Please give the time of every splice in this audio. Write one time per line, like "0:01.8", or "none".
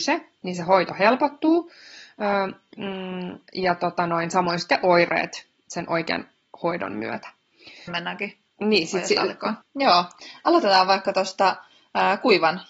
0:07.9
0:09.6